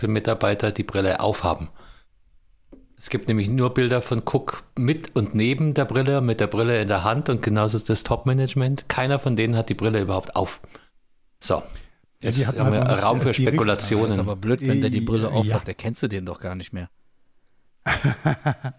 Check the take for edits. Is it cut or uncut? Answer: uncut